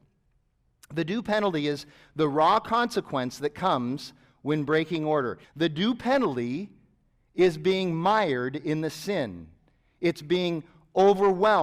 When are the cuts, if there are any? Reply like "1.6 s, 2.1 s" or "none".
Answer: 5.4 s